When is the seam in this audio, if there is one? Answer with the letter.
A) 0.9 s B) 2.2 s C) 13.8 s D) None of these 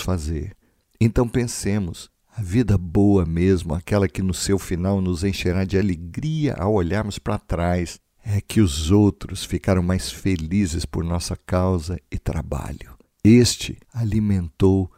C